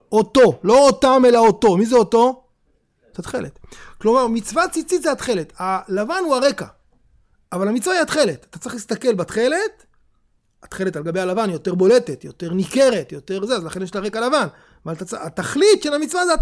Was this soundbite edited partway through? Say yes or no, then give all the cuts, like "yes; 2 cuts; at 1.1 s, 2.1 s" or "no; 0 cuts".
no; 0 cuts